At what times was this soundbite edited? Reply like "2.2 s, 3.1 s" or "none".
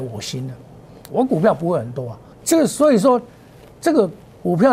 1.1 s, 2.3 s